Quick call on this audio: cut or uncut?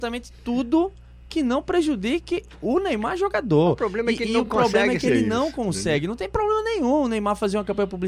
uncut